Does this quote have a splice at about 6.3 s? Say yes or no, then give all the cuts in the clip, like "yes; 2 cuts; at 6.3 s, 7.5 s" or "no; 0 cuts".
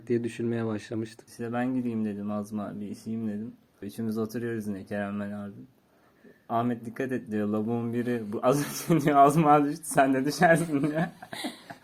no; 2 cuts; at 1.3 s, 3.8 s